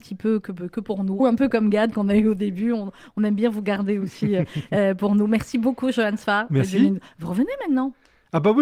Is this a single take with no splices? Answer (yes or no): no